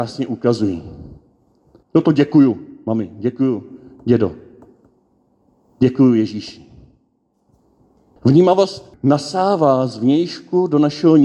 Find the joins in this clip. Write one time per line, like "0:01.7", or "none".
0:01.8
0:08.2